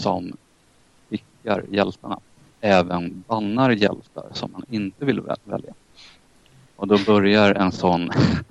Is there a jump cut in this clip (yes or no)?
no